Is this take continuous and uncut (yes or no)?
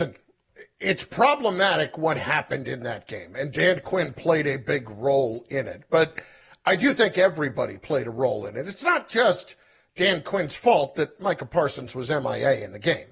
yes